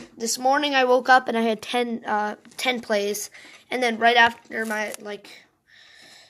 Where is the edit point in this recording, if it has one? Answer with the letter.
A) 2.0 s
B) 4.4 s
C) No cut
C